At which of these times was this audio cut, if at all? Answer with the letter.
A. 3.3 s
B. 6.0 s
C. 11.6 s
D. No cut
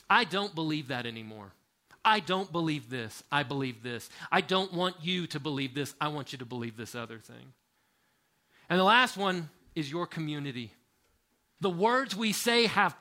C